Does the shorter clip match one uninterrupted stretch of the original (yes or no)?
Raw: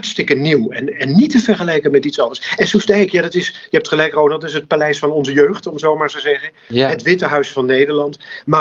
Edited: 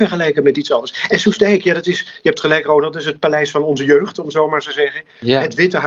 yes